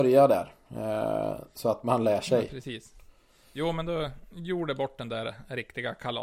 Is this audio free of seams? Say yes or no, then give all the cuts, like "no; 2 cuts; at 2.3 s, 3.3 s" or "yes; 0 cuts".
yes; 0 cuts